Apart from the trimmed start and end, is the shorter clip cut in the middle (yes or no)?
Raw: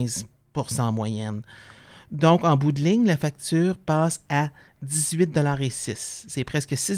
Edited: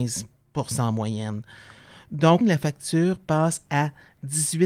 yes